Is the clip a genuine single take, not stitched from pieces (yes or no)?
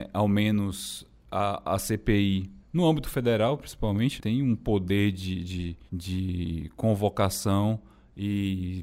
no